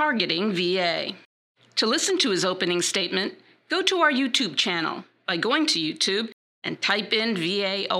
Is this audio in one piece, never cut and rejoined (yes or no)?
yes